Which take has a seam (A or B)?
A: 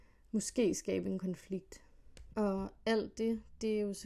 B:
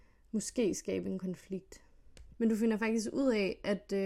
B